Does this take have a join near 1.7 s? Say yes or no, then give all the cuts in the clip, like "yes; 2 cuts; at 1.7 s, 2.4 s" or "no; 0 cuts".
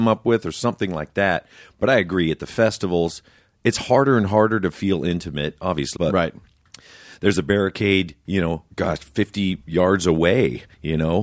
no; 2 cuts; at 6.0 s, 8.7 s